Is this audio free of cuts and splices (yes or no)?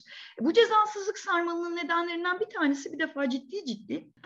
yes